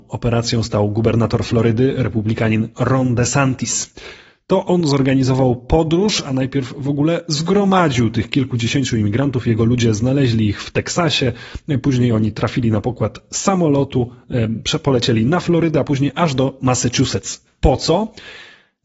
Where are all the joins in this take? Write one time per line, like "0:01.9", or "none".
none